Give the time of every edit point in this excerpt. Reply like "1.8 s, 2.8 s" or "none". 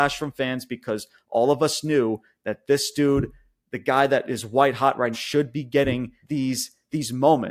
5.1 s, 6.2 s